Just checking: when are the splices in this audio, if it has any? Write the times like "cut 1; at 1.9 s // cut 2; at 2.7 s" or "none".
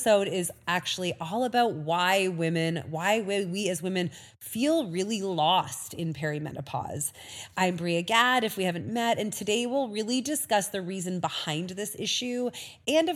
none